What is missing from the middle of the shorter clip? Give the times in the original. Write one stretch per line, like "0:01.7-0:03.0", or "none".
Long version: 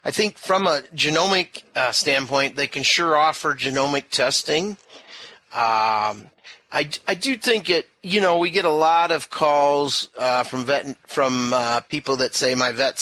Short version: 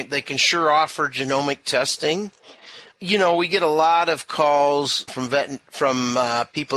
0:05.4-0:07.9
0:10.1-0:10.4